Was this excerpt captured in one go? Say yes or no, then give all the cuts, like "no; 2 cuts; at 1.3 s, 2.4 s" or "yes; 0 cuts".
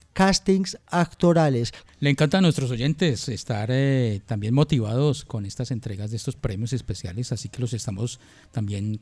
no; 1 cut; at 1.9 s